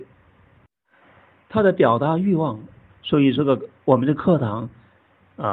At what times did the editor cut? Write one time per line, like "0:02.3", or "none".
0:02.9